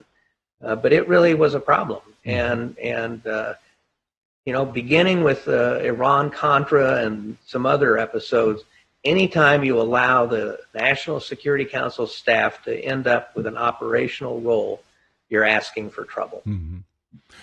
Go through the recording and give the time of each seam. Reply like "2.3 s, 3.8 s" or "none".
none